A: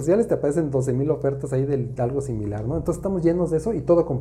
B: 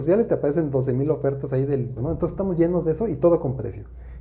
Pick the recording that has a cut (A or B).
B